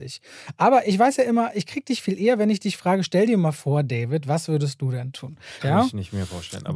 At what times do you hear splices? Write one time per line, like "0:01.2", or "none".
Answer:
0:05.6